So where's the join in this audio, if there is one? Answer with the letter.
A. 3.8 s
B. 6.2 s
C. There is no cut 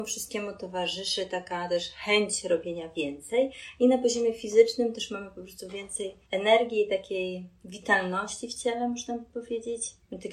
B